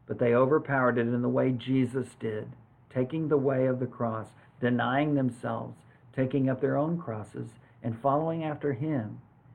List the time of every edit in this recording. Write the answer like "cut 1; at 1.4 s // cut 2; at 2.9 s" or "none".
none